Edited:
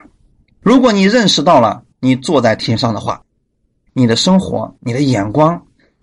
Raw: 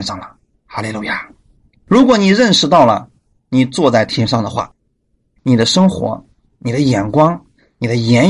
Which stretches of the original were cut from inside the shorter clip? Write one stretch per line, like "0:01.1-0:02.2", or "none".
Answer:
0:03.2-0:03.4
0:06.3-0:06.6